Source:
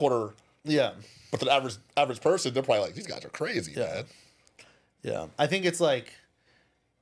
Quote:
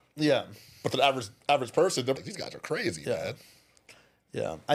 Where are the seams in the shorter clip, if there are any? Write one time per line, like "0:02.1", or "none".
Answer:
0:02.2